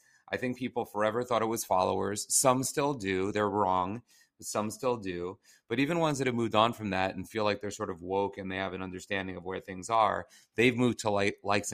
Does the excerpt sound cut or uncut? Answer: uncut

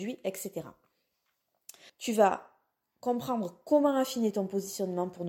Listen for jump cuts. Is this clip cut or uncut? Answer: cut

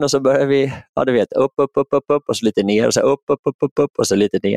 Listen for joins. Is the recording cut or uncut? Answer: uncut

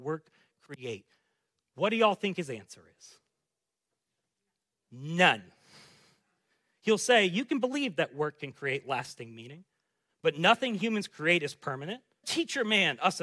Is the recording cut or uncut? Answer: cut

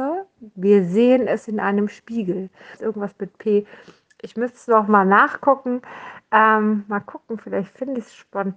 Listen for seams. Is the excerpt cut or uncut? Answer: cut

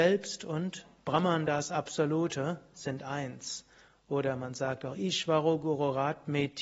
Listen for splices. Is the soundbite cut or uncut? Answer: uncut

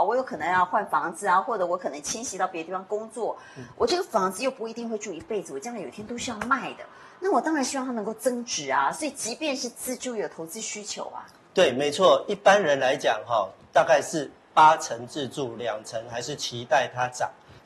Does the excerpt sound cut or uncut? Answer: uncut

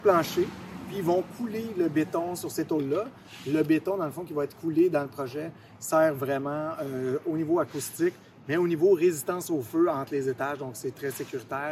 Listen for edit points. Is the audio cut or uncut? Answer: uncut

